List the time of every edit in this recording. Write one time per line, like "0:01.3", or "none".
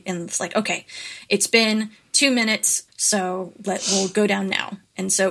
0:02.9